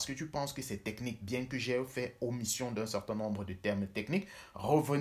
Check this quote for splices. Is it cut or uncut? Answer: uncut